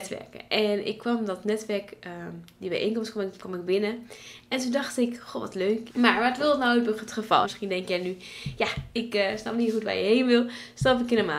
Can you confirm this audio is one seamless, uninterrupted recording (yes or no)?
no